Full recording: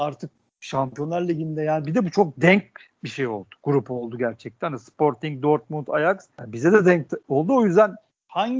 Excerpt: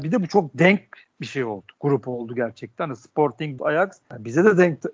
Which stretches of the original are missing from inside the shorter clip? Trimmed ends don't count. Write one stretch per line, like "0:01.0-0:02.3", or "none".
0:05.4-0:05.9